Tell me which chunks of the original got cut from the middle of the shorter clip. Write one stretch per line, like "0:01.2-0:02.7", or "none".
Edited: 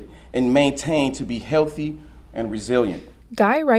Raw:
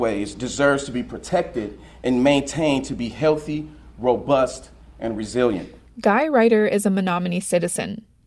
0:03.9-0:04.9